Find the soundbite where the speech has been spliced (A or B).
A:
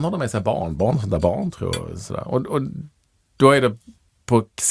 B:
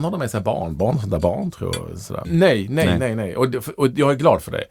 B